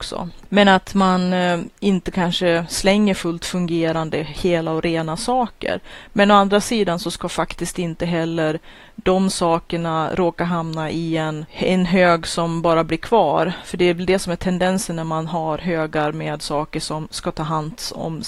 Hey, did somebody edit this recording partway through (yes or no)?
no